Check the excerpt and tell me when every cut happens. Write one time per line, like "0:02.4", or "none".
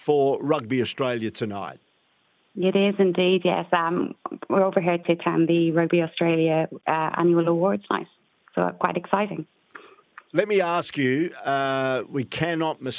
none